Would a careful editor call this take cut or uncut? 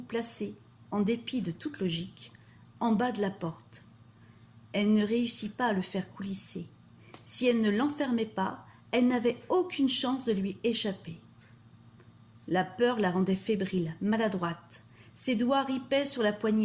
uncut